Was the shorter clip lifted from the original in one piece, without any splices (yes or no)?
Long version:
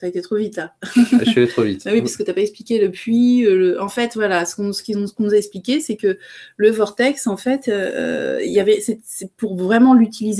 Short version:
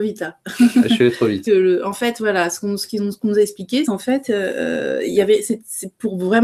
no